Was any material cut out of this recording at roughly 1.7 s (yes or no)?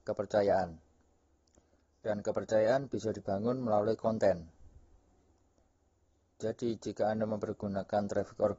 no